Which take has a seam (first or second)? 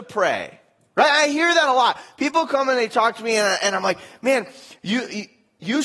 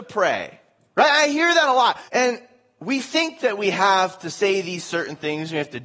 second